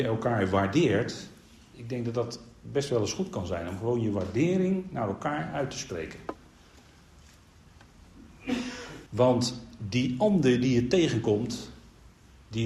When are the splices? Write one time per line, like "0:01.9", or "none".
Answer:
0:01.7
0:09.1